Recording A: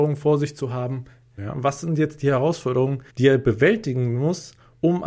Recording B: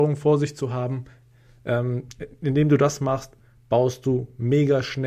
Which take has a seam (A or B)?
A